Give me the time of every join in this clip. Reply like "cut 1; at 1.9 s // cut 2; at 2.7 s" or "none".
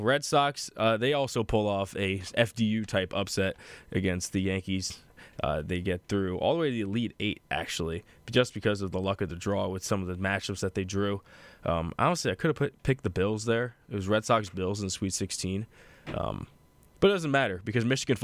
none